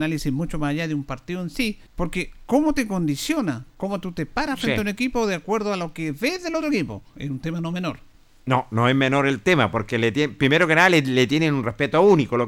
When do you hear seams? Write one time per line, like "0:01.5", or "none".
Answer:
0:01.9
0:07.1